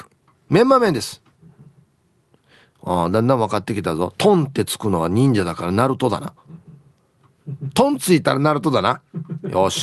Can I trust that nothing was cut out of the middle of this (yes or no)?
yes